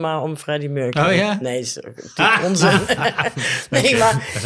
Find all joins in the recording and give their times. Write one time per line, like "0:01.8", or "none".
none

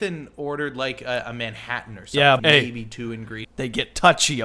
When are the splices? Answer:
0:02.4
0:03.4

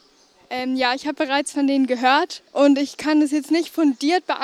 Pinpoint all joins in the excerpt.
0:02.5

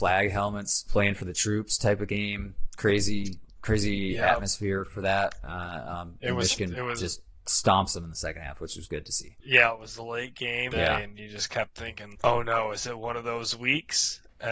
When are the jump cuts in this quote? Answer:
0:10.7
0:12.1

